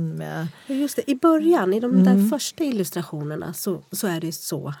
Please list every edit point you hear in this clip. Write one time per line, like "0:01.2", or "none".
none